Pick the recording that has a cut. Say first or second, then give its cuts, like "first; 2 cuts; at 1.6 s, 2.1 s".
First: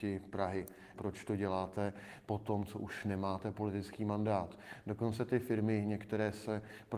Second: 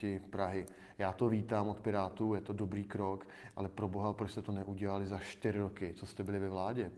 first; 1 cut; at 0.9 s